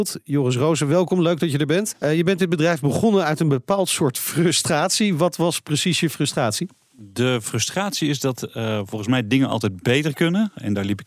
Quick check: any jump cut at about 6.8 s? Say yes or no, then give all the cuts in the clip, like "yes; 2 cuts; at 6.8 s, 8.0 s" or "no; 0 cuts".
no; 1 cut; at 1.9 s